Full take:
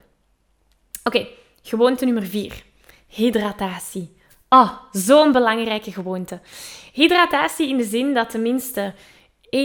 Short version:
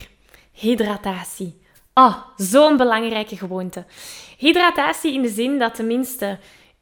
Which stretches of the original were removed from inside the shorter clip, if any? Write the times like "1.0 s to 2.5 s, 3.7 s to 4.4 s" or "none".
none